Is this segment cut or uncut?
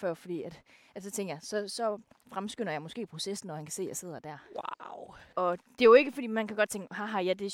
uncut